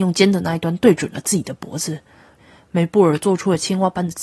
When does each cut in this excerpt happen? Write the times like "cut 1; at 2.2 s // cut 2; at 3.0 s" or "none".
cut 1; at 2.4 s